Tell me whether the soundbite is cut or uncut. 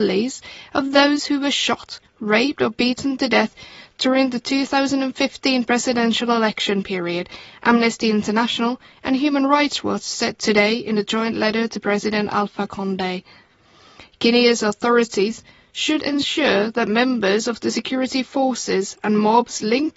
uncut